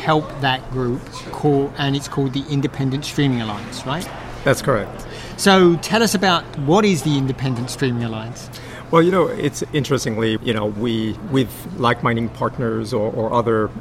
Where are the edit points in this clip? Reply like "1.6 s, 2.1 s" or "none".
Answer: 10.4 s

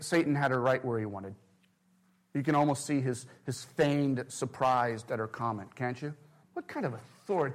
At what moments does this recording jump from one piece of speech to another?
6.4 s

